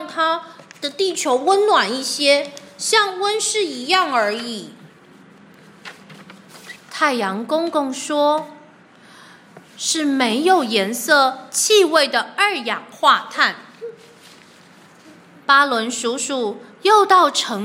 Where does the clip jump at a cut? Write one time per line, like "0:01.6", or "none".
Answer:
0:06.8